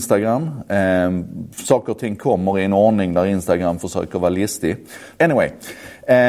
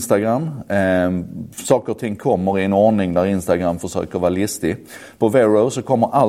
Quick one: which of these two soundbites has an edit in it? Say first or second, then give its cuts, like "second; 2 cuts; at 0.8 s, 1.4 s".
first; 1 cut; at 5.2 s